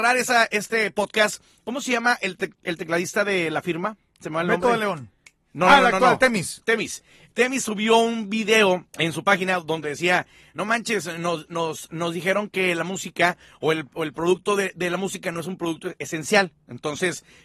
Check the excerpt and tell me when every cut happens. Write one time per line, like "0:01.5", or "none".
0:08.9

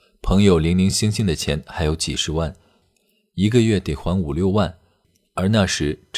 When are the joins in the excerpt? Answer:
none

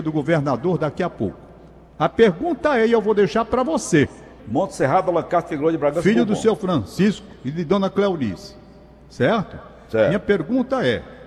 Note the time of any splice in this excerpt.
0:04.4

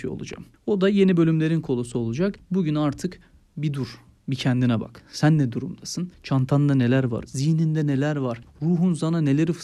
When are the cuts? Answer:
0:07.3
0:08.5

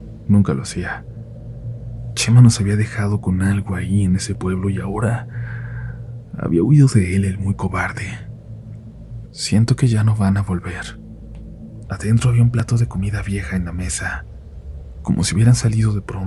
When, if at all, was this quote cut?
0:09.2
0:11.8

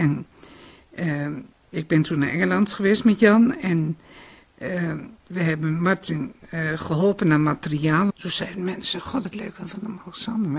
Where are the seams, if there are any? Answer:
0:08.1
0:09.2

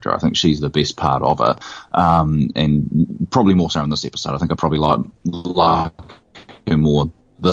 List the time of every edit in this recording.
none

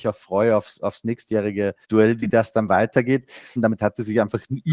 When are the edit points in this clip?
0:01.8
0:03.6

